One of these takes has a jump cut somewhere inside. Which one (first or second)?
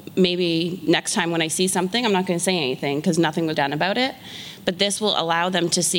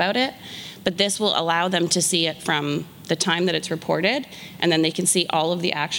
first